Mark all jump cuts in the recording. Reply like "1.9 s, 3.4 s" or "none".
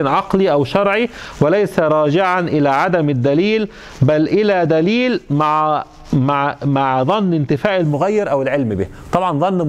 none